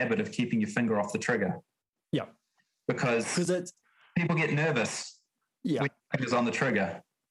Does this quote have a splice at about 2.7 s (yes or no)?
no